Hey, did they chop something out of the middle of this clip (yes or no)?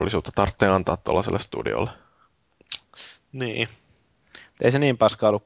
no